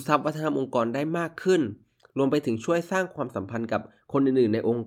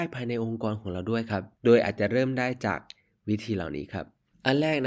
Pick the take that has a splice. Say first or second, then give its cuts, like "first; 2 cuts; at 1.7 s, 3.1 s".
second; 1 cut; at 1.5 s